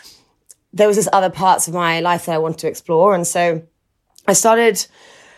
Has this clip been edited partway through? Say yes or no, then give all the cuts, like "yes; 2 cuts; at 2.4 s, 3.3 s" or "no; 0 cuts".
no; 0 cuts